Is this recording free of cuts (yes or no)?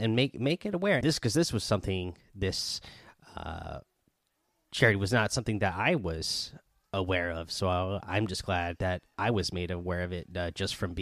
no